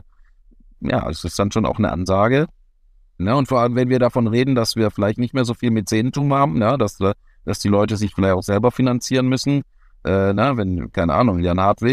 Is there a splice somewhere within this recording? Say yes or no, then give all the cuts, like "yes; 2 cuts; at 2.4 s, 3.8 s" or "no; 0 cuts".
yes; 1 cut; at 3.2 s